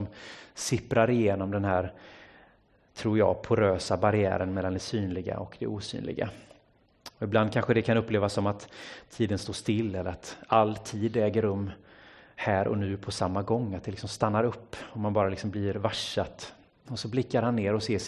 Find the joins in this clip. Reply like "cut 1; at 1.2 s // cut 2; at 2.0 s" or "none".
cut 1; at 16.9 s